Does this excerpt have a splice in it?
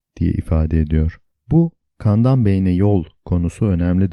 yes; 1 cut; at 1.3 s

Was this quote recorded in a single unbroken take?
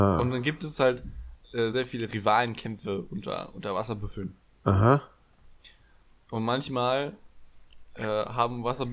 yes; 0 cuts

